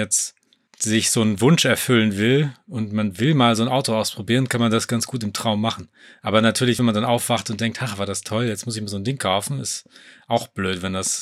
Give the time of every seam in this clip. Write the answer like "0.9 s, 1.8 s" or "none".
none